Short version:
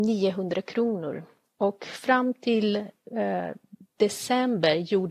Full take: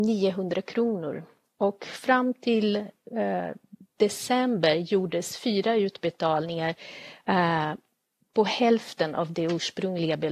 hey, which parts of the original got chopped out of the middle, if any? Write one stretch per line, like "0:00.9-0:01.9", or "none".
none